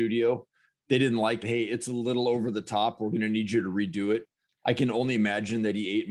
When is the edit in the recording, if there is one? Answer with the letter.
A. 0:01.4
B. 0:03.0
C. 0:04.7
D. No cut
A